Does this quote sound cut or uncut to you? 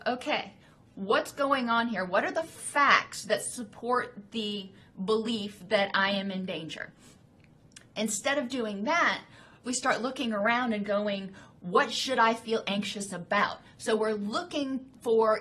cut